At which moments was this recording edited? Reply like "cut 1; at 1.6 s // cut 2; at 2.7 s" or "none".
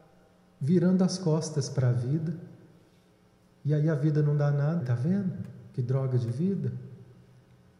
cut 1; at 4.8 s